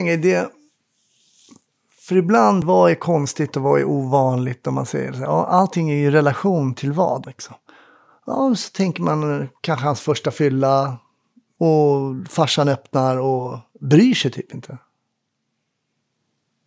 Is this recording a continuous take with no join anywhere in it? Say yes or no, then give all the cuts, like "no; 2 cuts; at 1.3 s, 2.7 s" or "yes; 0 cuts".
no; 2 cuts; at 2.6 s, 7.2 s